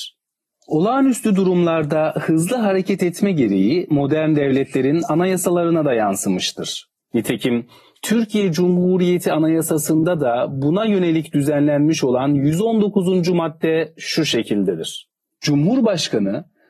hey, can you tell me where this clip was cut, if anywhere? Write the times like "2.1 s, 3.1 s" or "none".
7.0 s